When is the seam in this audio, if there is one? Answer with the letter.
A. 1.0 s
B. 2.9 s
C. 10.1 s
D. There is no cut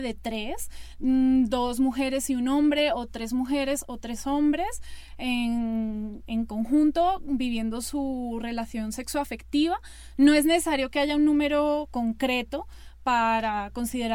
A